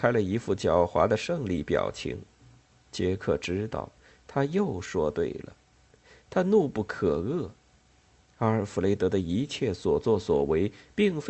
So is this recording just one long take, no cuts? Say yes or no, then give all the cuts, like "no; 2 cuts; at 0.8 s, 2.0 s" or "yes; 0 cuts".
yes; 0 cuts